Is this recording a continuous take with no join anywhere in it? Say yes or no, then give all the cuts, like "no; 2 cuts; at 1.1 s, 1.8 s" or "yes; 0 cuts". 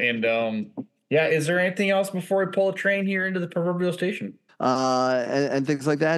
no; 1 cut; at 4.5 s